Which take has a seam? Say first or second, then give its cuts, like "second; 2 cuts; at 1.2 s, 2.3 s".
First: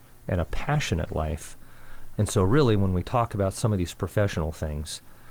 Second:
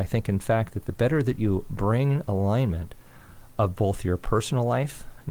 first; 1 cut; at 2.1 s